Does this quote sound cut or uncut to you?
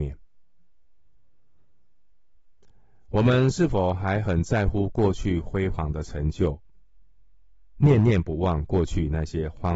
uncut